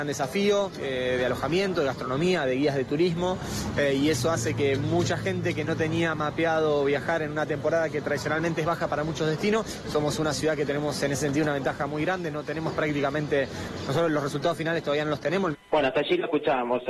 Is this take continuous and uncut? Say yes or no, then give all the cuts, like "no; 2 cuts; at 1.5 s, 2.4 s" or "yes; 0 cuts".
no; 3 cuts; at 9.8 s, 13.9 s, 15.5 s